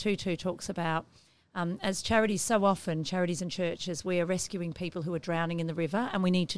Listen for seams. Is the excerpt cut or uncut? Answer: uncut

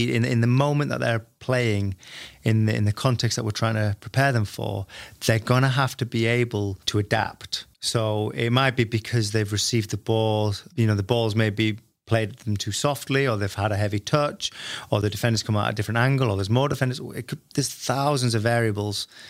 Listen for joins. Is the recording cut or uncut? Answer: cut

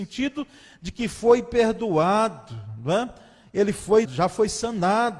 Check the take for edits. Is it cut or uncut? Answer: cut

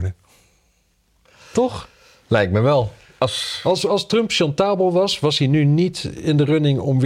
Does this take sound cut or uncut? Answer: uncut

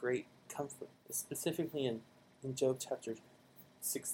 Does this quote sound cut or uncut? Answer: cut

